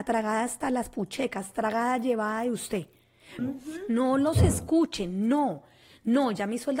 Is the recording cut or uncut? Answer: cut